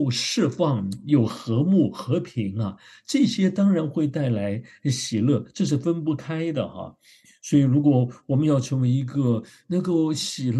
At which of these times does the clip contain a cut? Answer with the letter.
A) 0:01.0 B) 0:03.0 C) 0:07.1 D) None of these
D